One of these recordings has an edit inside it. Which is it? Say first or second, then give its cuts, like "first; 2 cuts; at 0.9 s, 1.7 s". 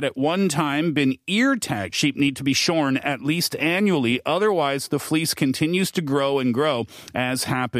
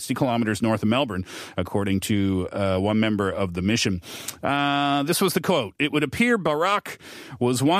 first; 1 cut; at 1.9 s